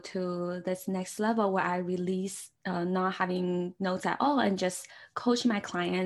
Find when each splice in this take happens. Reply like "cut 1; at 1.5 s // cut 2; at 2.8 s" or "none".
cut 1; at 2.6 s